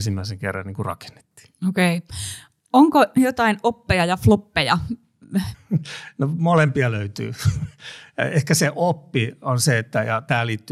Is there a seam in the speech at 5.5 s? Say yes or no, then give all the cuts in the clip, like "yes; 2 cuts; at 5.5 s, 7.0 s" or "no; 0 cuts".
yes; 1 cut; at 5.5 s